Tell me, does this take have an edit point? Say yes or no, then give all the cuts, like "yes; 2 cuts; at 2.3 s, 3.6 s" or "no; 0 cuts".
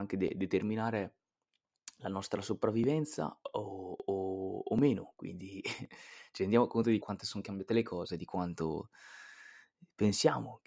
yes; 1 cut; at 7.0 s